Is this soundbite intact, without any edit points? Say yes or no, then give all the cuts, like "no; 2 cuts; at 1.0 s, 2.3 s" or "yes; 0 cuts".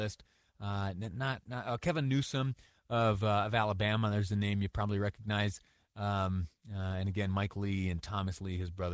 yes; 0 cuts